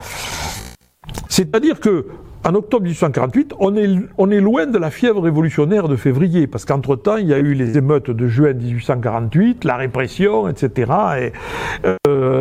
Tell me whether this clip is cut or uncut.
cut